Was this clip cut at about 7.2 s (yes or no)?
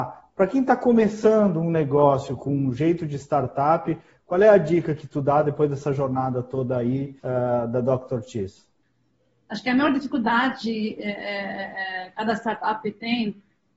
yes